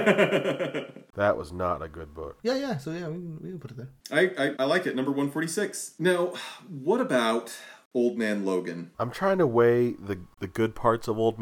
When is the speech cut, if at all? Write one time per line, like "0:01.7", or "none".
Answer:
0:04.6

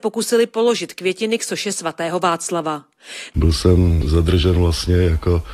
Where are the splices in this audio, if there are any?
0:03.3

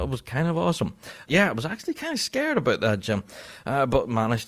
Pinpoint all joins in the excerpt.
0:01.3

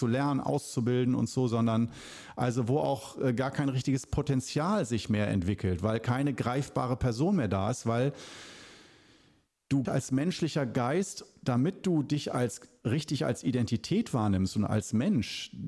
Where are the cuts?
0:09.9

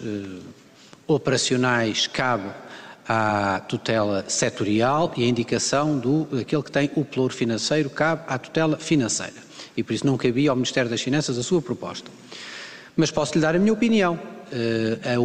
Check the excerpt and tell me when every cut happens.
none

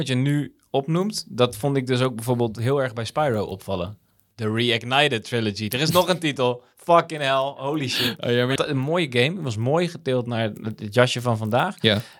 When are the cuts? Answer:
0:08.6

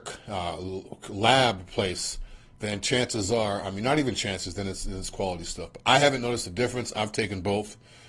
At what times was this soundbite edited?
none

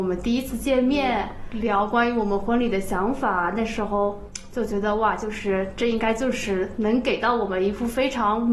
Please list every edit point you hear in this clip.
none

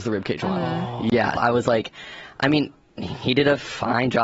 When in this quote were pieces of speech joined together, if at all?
0:01.4

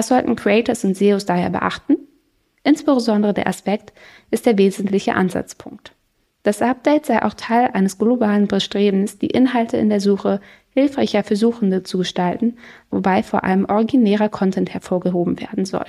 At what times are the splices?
0:04.2

